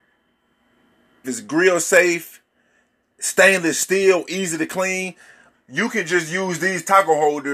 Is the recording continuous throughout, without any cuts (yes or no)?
no